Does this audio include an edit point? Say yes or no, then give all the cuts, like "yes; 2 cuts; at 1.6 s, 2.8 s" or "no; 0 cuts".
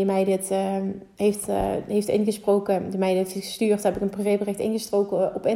no; 0 cuts